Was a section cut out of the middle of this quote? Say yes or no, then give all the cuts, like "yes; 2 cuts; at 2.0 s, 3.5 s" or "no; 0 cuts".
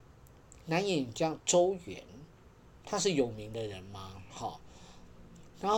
no; 0 cuts